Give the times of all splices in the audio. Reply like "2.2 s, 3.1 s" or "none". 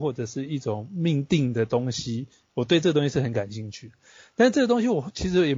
none